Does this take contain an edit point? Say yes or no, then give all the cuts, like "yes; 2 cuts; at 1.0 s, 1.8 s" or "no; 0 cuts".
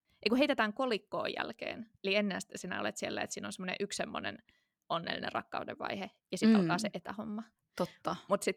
no; 0 cuts